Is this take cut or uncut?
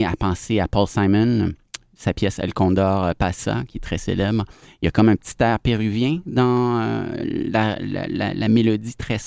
uncut